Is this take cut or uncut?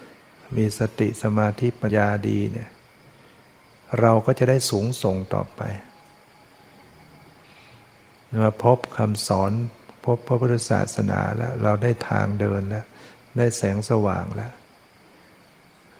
cut